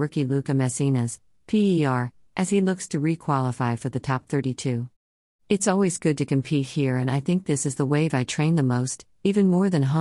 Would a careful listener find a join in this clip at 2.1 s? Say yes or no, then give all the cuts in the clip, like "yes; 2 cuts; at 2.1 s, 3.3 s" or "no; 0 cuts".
no; 1 cut; at 5.3 s